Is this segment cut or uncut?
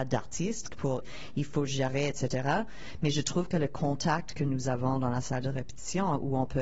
cut